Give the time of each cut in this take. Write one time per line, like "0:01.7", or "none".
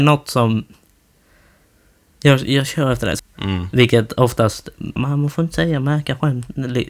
0:03.2
0:05.0